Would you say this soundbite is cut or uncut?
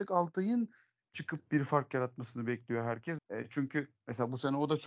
cut